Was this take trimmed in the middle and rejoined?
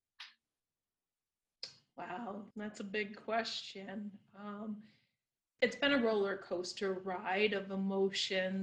yes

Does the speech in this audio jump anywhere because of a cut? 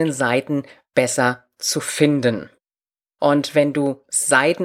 yes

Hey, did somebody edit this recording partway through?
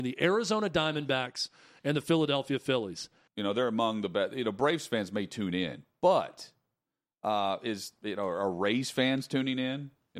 yes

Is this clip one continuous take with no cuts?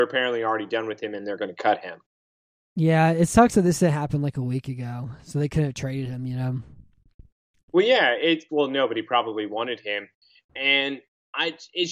no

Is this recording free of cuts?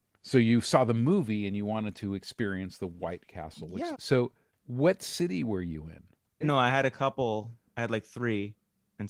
no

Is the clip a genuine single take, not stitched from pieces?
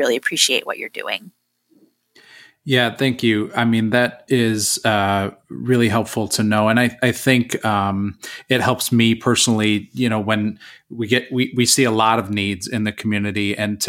yes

